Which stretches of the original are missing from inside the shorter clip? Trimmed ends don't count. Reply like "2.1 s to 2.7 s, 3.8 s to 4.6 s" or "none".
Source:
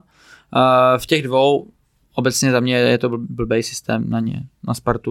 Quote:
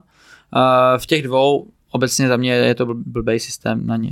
1.8 s to 2.0 s